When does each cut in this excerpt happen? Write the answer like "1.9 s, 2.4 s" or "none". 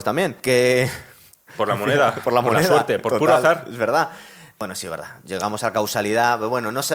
none